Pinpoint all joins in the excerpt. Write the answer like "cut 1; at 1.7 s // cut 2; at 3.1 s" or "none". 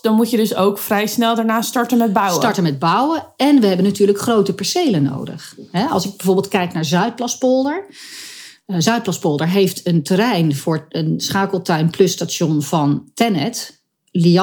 none

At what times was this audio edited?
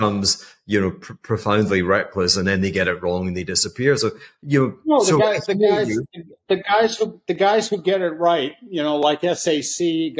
none

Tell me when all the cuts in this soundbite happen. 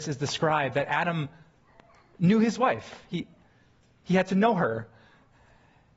none

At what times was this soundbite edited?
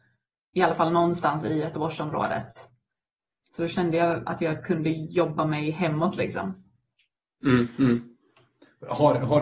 none

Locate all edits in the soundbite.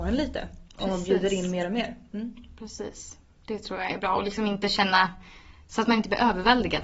none

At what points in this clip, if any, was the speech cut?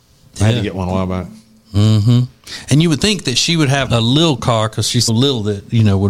cut 1; at 3.9 s // cut 2; at 5.1 s

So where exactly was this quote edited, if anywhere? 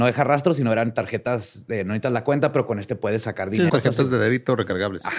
cut 1; at 3.7 s

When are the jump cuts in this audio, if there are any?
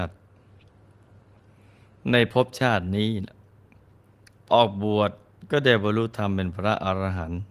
cut 1; at 4.5 s

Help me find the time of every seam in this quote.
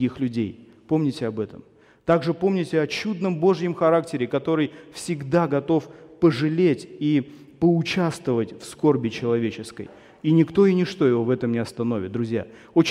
none

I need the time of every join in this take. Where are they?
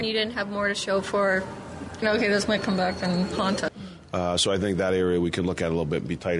cut 1; at 2.0 s // cut 2; at 3.7 s

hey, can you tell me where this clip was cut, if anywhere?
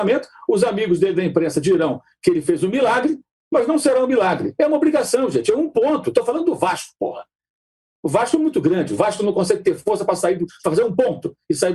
none

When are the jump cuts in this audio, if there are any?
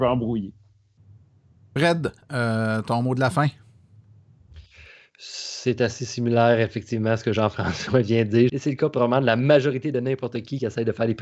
cut 1; at 8.5 s

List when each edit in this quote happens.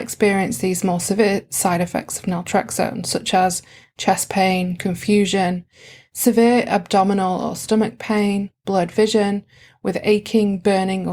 none

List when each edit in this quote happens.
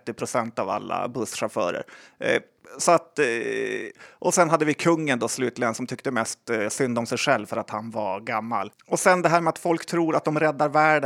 none

